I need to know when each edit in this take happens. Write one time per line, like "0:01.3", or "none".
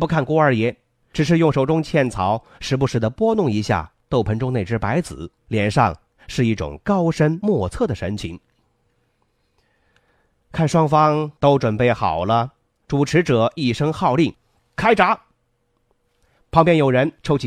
0:05.4